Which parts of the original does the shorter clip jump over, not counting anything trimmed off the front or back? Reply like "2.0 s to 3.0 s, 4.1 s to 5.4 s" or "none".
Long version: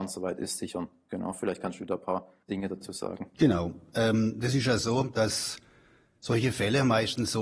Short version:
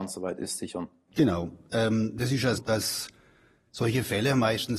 1.1 s to 3.3 s, 4.8 s to 5.1 s